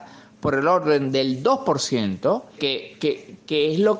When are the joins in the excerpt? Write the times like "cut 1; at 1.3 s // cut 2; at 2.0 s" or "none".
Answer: cut 1; at 2.6 s